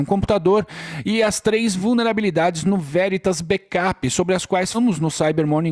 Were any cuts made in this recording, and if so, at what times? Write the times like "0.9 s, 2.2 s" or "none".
4.7 s